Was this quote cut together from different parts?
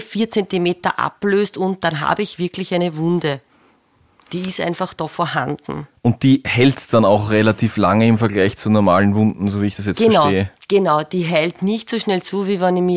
no; 0 cuts

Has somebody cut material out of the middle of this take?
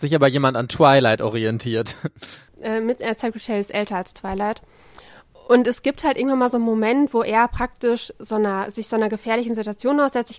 no; 0 cuts

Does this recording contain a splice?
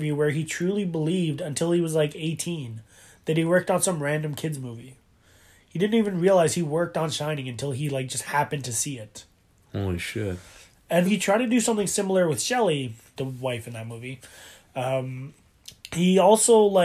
yes; 2 cuts; at 11.1 s, 13.2 s

